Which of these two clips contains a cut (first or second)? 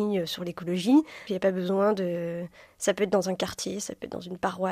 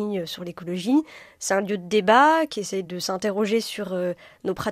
first